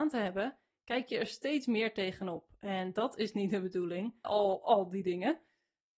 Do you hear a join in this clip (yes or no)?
yes